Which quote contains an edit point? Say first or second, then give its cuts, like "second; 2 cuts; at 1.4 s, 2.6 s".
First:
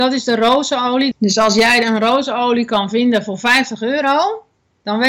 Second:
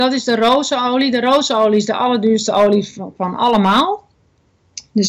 first; 1 cut; at 1.1 s